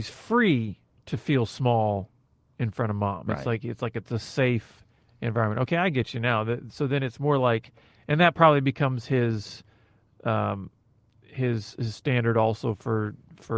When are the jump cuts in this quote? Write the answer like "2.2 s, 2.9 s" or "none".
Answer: none

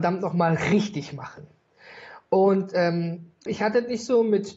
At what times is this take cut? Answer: 3.5 s

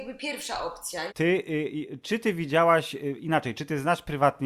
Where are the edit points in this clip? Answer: 1.1 s

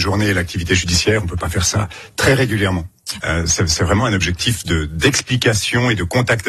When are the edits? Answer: 3.2 s

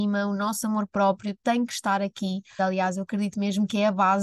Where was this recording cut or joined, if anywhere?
2.6 s

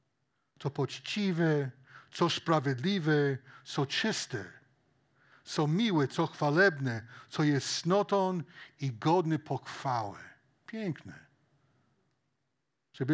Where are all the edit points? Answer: none

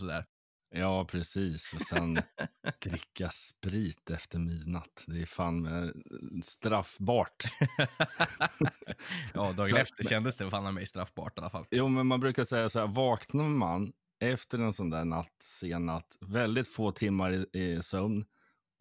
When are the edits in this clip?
none

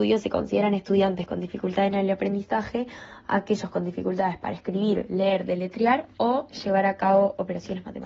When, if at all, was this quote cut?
none

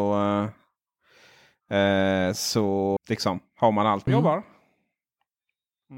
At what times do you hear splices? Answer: 3.0 s, 4.1 s

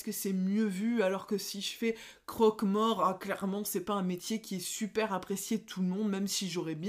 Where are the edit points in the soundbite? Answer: none

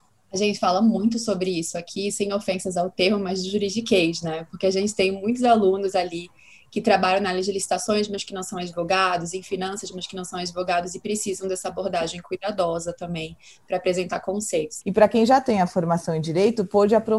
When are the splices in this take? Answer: 14.8 s

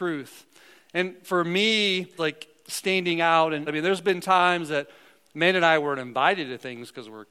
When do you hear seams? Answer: 2.2 s, 3.7 s

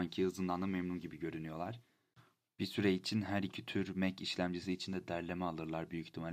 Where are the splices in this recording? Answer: none

